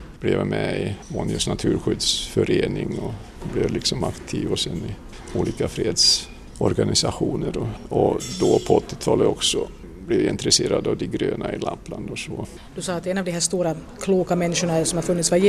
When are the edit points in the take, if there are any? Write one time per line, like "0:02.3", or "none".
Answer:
none